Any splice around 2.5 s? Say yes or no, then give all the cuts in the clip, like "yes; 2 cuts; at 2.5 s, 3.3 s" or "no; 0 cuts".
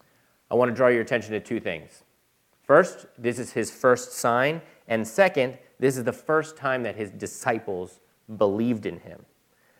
no; 0 cuts